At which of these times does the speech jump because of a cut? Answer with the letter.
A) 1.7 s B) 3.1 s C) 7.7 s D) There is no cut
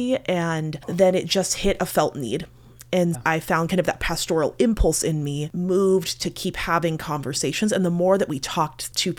B